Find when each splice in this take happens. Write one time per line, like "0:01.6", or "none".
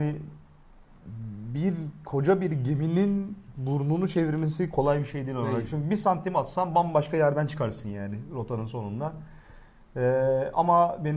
none